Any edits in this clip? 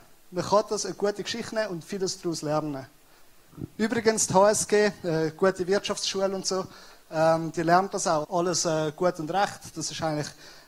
yes; 1 cut; at 8.2 s

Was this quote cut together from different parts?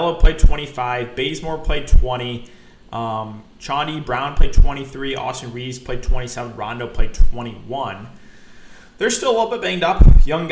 no; 0 cuts

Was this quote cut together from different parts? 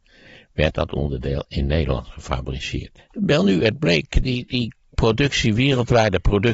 yes; 1 cut; at 3.0 s

